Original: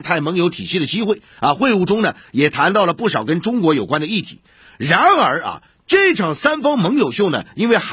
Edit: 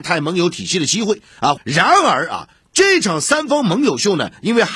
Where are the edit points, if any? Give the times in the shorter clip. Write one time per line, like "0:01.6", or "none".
0:01.6